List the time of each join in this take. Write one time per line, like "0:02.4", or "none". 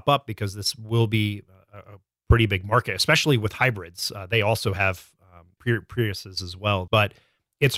0:05.6
0:06.9